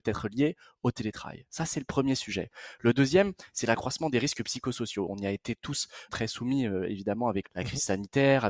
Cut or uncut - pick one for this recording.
cut